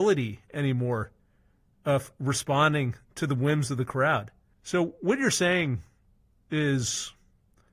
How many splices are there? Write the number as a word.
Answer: one